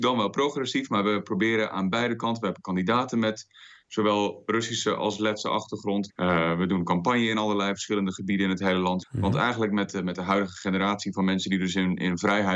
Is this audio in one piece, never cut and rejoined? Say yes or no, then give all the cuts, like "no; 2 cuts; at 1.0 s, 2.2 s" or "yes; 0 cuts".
no; 2 cuts; at 6.1 s, 9.0 s